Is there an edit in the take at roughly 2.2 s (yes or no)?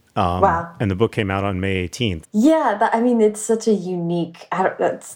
yes